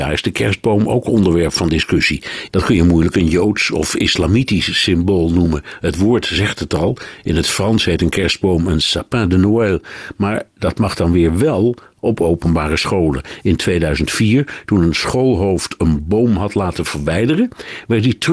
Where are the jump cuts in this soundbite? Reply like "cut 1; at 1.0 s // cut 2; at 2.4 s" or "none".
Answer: cut 1; at 2.5 s